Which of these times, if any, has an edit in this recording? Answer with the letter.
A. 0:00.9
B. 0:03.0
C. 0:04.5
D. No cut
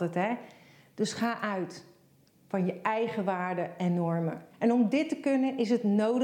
C